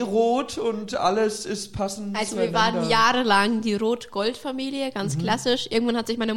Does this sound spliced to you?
no; 0 cuts

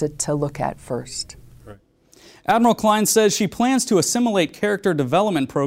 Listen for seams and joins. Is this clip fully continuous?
yes; 0 cuts

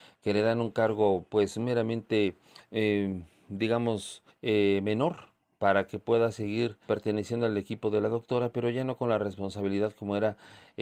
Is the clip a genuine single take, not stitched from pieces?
no; 2 cuts; at 4.3 s, 6.9 s

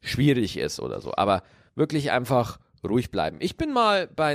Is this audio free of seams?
yes; 0 cuts

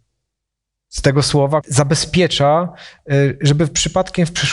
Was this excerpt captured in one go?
no; 1 cut; at 1.6 s

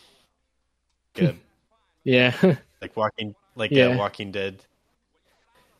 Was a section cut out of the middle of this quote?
yes; 1 cut; at 1.1 s

